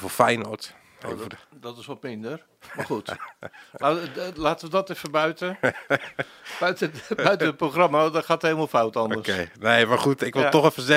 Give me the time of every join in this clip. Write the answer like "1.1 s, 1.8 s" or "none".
none